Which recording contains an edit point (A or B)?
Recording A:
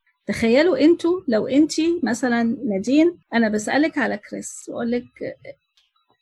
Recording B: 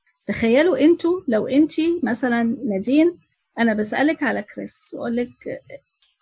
A